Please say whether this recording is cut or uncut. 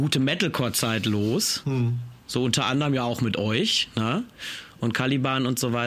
uncut